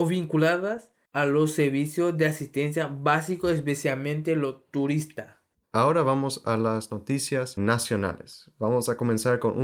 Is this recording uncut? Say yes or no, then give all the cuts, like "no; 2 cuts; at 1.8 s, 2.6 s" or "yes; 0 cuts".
no; 2 cuts; at 5.6 s, 7.6 s